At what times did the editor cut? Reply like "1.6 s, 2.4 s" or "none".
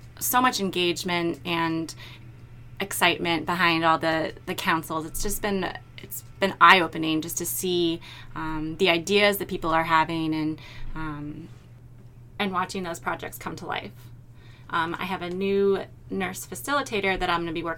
4.5 s, 14.7 s